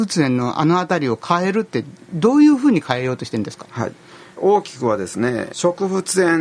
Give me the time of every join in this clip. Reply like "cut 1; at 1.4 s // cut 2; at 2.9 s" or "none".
cut 1; at 4.4 s // cut 2; at 5.5 s